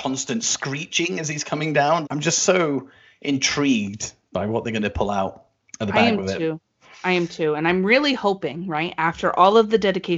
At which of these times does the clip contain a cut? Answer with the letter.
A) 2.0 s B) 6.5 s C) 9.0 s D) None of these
A